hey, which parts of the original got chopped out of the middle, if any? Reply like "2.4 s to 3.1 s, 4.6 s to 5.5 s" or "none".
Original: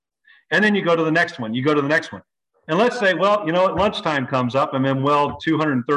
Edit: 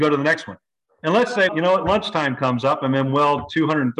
3.1 s to 3.4 s